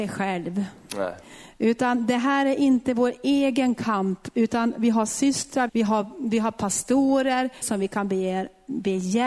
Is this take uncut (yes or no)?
no